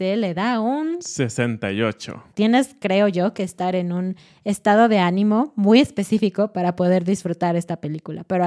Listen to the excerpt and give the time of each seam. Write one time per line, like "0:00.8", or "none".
0:02.3